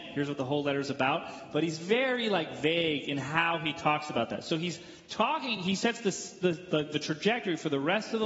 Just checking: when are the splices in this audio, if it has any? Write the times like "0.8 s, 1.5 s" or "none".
none